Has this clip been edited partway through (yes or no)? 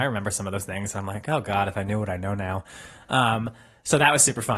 no